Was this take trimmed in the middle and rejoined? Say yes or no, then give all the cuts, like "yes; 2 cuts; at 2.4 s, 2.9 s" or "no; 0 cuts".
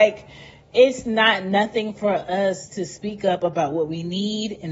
no; 0 cuts